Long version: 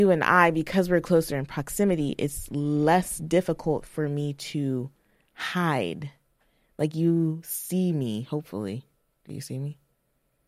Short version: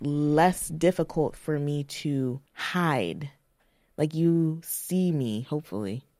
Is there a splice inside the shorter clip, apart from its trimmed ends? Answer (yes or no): yes